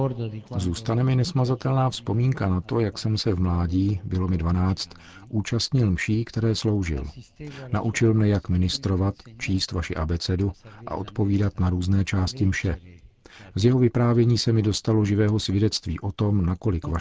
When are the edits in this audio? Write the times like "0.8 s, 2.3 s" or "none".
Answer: 13.5 s